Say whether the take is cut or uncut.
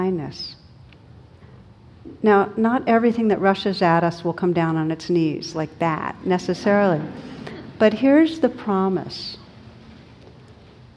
uncut